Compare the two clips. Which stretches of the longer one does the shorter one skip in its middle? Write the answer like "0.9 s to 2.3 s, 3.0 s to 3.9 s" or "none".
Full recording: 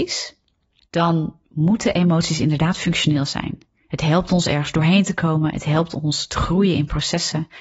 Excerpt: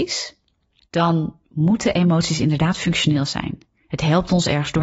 none